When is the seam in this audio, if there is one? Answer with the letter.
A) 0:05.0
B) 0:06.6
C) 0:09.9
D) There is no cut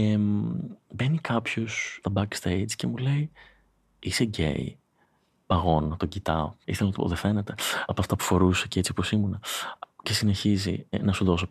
B